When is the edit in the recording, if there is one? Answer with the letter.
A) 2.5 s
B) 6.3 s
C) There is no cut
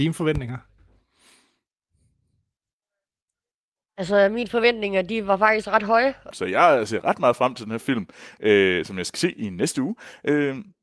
B